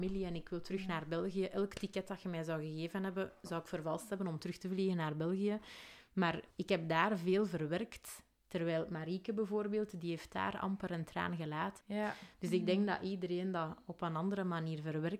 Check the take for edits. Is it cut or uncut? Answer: cut